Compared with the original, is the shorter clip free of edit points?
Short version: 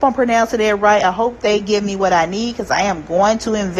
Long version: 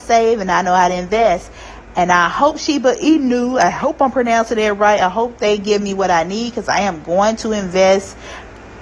yes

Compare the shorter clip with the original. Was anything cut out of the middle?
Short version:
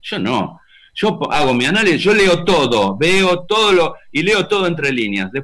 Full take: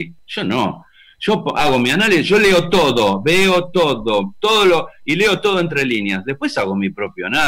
yes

